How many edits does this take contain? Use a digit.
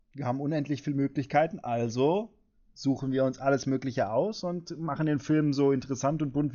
0